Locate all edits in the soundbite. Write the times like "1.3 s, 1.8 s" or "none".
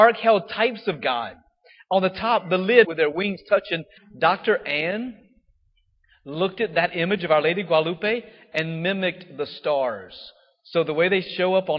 2.8 s, 4.0 s